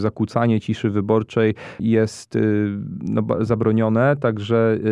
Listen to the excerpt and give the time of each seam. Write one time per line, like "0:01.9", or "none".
none